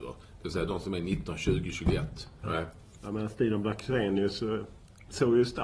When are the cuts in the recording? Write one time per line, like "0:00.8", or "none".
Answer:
0:02.4